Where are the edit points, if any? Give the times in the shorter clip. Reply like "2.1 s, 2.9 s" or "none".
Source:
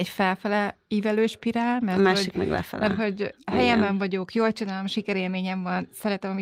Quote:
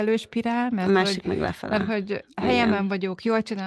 none